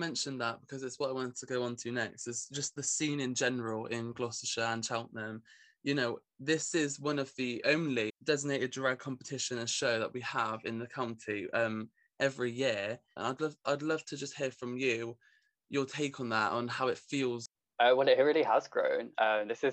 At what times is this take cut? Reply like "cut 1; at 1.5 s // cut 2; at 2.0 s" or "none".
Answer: cut 1; at 8.1 s // cut 2; at 13.2 s